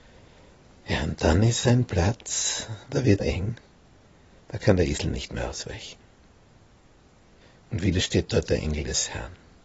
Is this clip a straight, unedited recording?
no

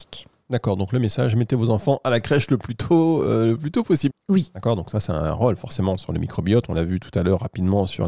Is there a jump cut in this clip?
yes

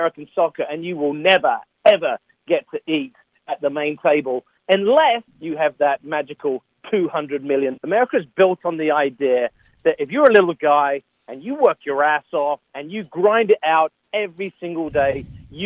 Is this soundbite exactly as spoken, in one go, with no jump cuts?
no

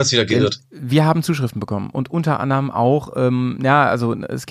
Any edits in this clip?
no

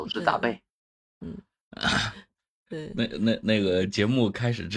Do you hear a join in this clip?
no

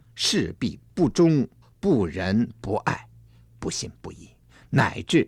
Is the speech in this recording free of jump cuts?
no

